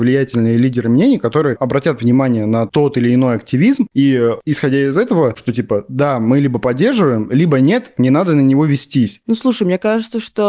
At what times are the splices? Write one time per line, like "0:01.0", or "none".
0:05.4
0:07.9